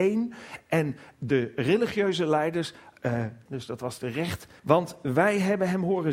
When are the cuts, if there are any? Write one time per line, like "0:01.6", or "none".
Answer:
0:03.5
0:04.6